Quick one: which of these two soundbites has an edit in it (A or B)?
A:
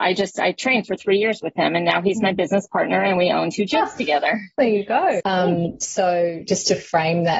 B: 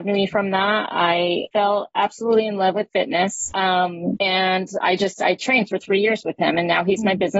A